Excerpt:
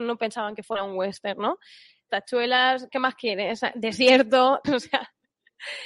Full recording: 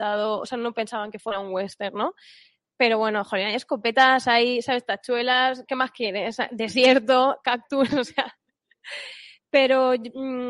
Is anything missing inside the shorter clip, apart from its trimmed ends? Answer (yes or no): yes